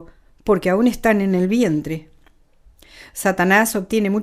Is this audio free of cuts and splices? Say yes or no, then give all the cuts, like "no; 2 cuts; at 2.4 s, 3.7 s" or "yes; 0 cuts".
yes; 0 cuts